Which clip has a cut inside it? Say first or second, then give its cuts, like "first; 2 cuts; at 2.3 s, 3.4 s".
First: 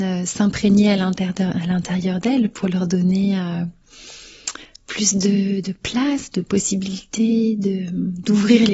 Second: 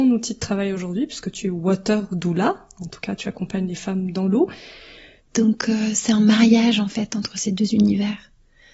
second; 1 cut; at 5.2 s